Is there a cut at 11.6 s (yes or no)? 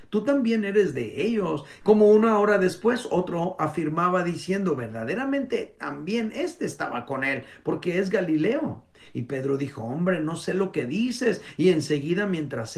no